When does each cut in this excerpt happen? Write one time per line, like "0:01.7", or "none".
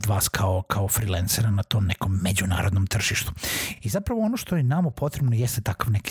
none